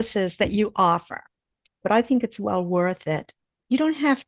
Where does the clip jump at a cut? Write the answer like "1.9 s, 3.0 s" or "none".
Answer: 1.8 s